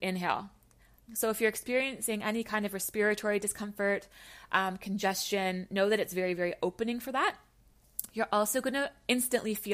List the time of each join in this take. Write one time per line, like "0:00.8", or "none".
0:01.1